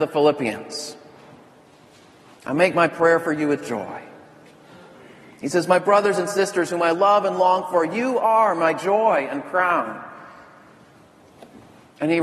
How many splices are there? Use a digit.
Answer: 0